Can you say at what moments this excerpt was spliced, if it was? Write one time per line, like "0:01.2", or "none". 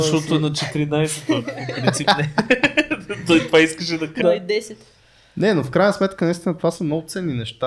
0:04.2